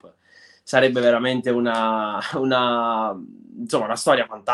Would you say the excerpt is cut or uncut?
uncut